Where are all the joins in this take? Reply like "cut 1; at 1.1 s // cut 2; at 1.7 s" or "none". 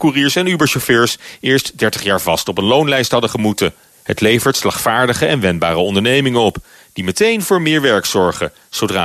cut 1; at 3.9 s